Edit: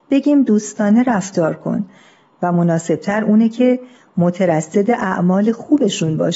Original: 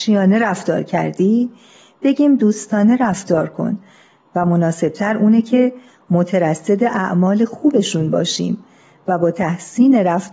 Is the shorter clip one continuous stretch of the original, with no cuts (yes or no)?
yes